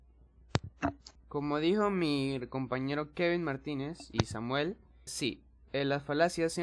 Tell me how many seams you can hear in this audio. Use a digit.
2